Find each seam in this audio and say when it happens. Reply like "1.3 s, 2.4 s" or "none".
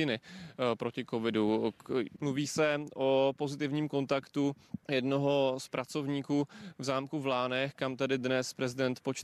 2.2 s, 4.8 s